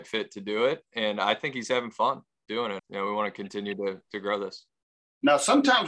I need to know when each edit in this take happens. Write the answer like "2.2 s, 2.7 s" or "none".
2.8 s